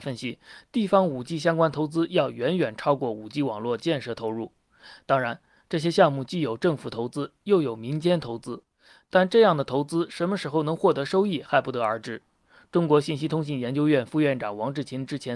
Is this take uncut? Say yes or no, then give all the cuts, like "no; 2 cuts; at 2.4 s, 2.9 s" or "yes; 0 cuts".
yes; 0 cuts